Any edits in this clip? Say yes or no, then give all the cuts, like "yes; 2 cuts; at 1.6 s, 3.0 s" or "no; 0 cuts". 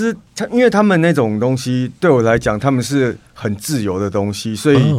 no; 0 cuts